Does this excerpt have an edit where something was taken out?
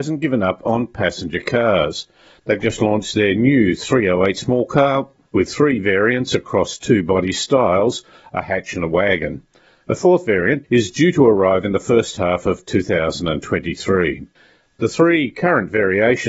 yes; 1 cut; at 10.6 s

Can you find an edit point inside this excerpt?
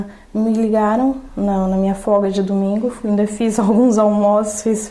no; 0 cuts

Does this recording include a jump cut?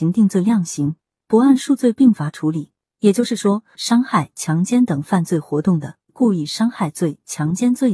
yes; 2 cuts; at 3.7 s, 6.1 s

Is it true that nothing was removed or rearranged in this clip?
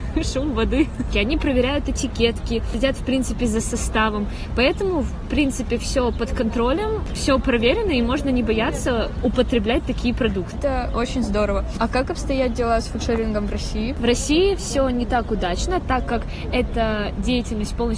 no; 1 cut; at 1.1 s

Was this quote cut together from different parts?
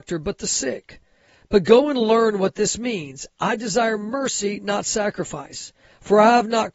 no; 0 cuts

